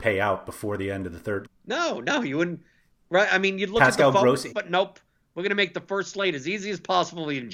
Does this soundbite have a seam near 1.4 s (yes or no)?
yes